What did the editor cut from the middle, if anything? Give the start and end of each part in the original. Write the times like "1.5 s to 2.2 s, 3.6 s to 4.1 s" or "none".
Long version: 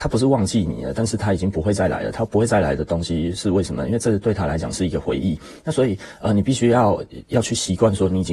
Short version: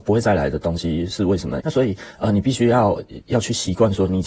3.9 s to 5.6 s

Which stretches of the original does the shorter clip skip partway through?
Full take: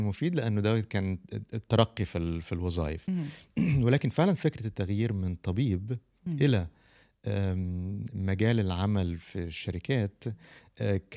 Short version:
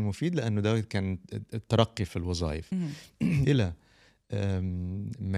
2.1 s to 2.4 s, 3.8 s to 6.4 s

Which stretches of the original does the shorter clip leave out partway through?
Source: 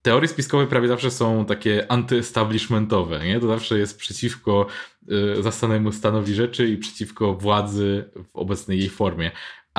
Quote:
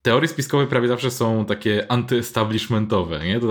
none

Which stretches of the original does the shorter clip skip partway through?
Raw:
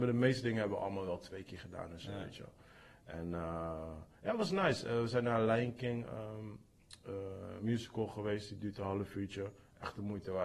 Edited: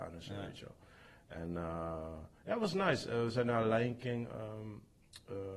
none

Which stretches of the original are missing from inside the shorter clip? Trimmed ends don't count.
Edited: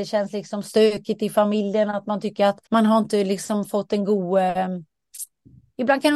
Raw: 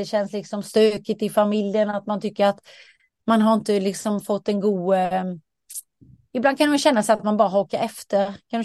2.7 s to 3.2 s

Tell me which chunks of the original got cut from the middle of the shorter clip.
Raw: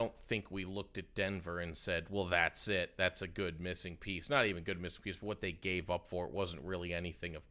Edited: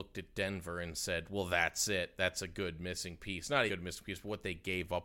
4.5 s to 4.6 s

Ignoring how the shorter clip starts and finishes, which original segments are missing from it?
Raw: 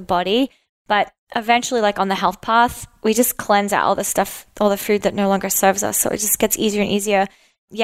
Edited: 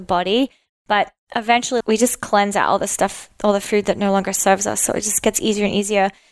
1.8 s to 3.0 s

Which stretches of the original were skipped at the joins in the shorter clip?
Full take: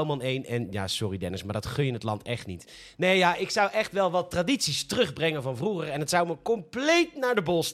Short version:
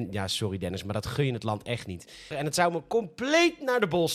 2.9 s to 5.9 s

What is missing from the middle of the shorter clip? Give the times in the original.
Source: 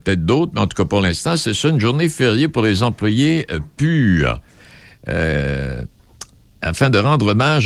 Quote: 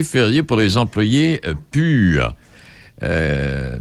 none

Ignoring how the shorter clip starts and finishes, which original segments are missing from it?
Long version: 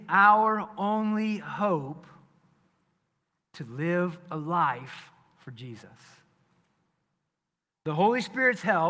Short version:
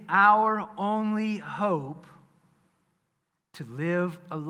none

